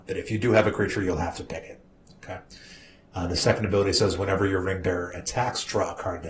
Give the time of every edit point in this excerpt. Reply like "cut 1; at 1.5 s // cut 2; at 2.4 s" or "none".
none